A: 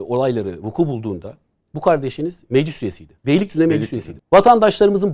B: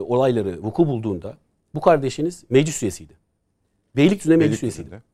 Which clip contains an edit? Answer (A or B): A